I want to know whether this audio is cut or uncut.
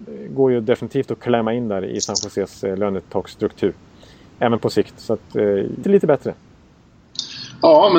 cut